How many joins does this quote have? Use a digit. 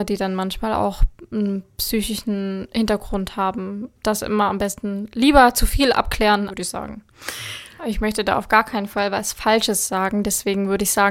2